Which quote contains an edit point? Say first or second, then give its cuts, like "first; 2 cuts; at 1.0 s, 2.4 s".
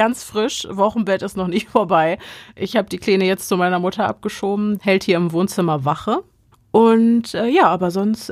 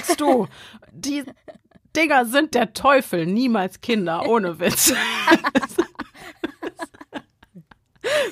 first; 2 cuts; at 4.8 s, 6.5 s